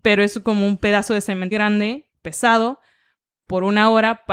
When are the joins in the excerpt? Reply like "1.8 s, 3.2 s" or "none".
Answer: 1.5 s